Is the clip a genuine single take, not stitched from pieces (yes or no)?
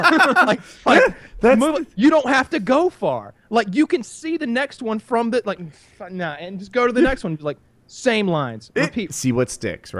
no